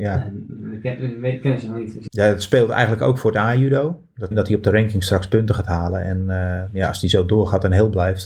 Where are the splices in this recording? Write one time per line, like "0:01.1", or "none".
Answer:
0:02.1
0:04.3

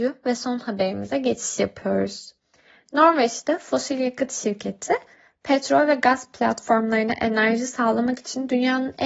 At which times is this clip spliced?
none

